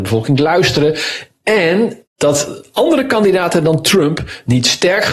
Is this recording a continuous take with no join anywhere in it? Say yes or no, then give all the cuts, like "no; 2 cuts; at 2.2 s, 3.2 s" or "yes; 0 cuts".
no; 1 cut; at 2.1 s